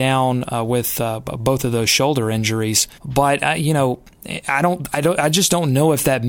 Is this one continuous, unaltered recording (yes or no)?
no